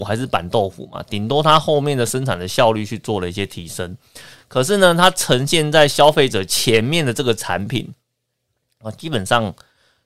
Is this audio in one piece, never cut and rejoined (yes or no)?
yes